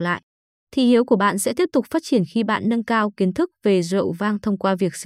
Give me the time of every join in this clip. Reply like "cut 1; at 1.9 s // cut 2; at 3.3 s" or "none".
none